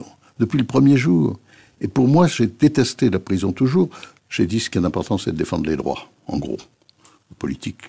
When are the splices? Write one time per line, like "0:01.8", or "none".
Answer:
0:04.2